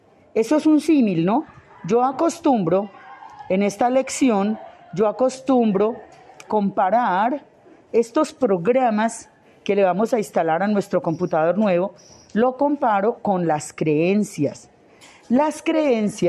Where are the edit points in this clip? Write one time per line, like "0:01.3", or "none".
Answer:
0:06.5